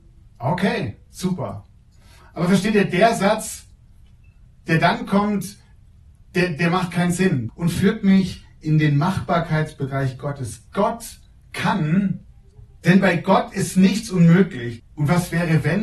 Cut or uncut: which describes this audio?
cut